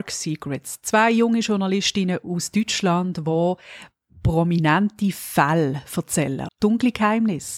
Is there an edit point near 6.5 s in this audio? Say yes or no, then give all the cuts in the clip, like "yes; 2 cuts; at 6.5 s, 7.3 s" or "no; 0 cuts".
yes; 1 cut; at 6.5 s